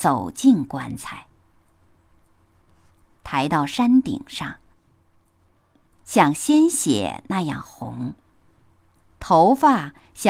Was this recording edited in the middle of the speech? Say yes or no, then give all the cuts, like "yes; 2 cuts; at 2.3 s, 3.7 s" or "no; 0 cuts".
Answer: yes; 2 cuts; at 3.1 s, 5.9 s